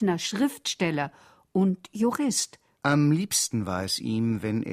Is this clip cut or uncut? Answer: cut